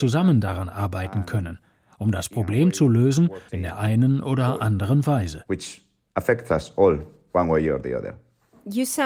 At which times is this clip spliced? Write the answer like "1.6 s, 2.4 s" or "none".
3.5 s